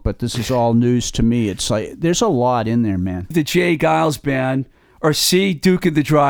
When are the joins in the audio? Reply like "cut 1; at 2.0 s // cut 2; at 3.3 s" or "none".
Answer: cut 1; at 3.3 s

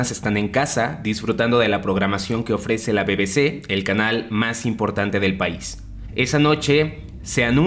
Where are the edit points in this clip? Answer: cut 1; at 6.1 s

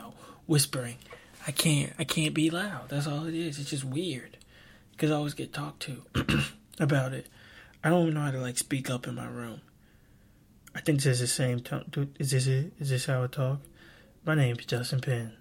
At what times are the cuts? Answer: cut 1; at 1.3 s

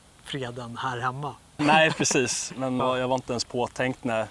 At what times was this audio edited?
cut 1; at 1.6 s // cut 2; at 2.8 s

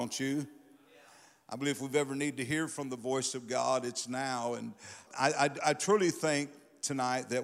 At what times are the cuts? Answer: cut 1; at 5.1 s

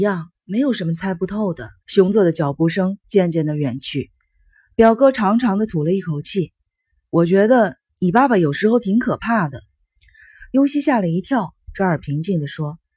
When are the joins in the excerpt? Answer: cut 1; at 1.8 s

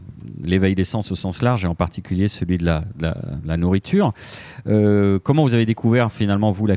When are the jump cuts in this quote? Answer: none

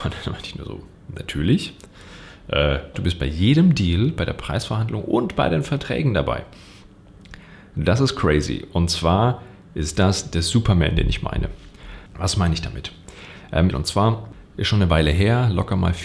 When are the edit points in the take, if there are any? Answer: cut 1; at 2.9 s // cut 2; at 12.1 s // cut 3; at 13.7 s

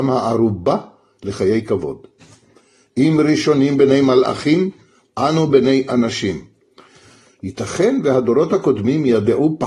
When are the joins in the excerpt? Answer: none

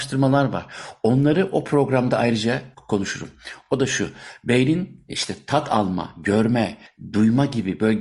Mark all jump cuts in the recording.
none

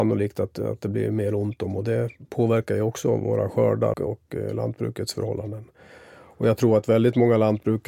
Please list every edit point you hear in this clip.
cut 1; at 3.9 s

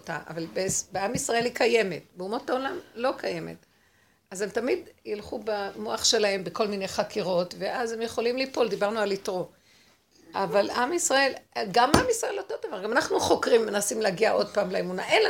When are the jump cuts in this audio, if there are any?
none

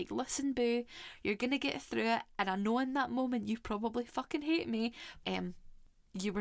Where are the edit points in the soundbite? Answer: cut 1; at 5.2 s

